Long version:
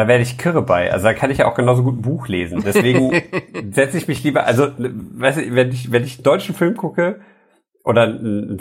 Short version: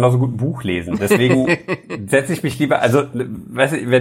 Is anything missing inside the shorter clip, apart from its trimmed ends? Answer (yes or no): no